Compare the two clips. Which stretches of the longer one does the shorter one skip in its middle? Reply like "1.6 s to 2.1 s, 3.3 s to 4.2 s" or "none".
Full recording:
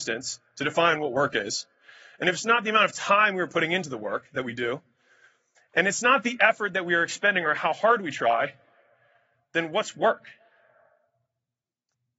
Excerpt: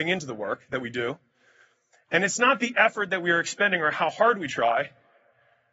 none